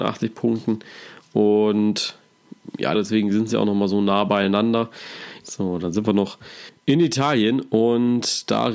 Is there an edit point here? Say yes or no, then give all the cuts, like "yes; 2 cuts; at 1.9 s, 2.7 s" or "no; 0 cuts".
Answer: yes; 2 cuts; at 2.9 s, 5.4 s